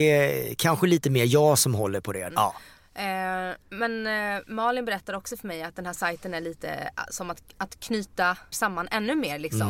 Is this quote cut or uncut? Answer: cut